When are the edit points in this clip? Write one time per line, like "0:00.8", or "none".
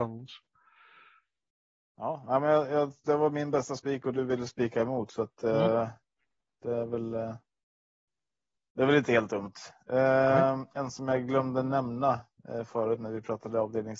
none